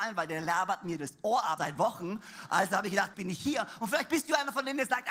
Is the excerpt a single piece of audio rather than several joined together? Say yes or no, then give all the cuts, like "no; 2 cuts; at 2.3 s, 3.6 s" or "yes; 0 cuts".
no; 2 cuts; at 1.6 s, 3.1 s